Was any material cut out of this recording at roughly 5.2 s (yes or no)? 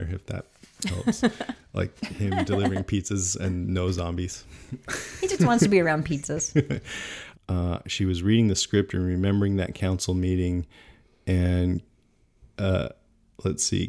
no